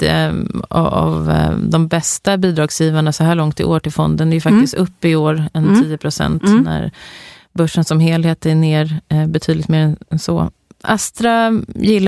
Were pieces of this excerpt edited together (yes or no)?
no